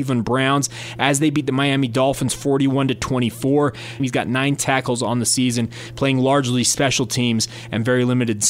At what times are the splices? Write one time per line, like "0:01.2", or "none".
0:04.0

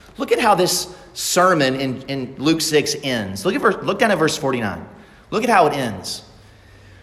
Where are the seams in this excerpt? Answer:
none

